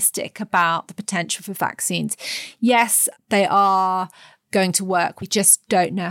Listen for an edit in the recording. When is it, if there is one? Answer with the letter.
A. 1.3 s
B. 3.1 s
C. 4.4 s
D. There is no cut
B